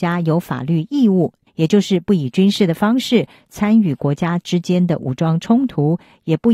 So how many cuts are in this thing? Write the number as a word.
one